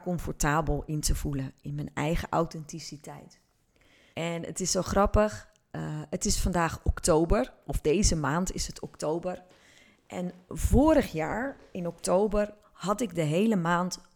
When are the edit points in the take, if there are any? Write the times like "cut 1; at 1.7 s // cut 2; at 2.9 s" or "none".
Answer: cut 1; at 4.1 s